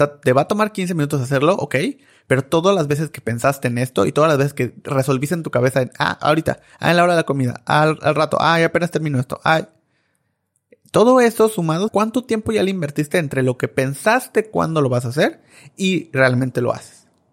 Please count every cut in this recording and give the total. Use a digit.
1